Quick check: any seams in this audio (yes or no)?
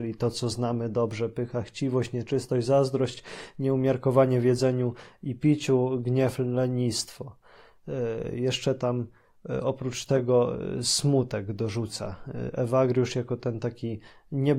no